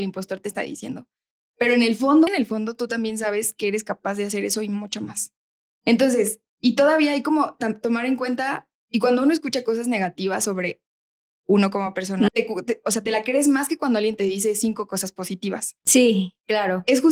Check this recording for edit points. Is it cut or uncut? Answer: cut